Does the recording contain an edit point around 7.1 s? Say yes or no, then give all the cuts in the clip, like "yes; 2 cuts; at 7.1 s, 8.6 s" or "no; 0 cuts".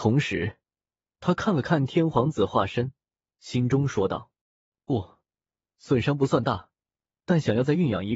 yes; 1 cut; at 7.1 s